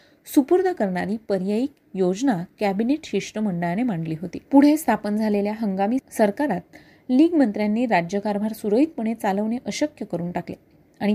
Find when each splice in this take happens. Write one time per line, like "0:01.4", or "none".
0:04.4